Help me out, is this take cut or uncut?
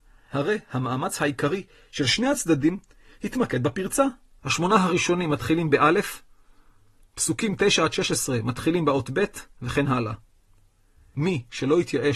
cut